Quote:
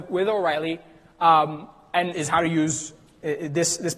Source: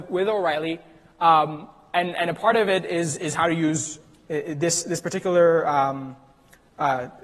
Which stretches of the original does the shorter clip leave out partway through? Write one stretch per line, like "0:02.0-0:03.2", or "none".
0:02.1-0:03.2